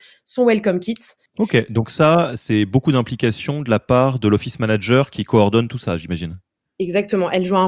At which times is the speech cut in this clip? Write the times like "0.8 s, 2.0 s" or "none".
1.3 s